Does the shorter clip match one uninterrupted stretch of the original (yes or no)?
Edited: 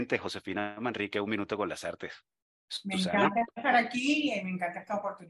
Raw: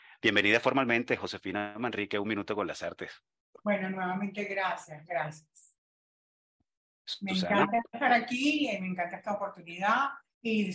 no